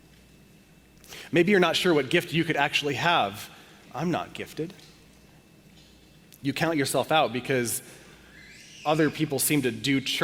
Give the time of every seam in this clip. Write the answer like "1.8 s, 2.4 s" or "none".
3.8 s